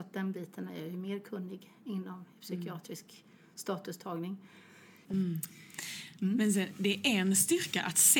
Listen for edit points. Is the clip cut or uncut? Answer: cut